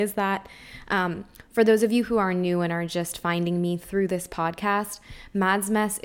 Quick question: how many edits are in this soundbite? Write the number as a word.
zero